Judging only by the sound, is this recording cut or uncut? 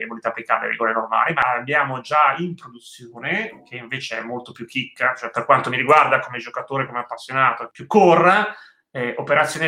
uncut